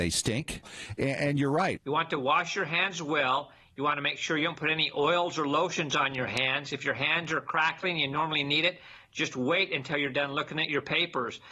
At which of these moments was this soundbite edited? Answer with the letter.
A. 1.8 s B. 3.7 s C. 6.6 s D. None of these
A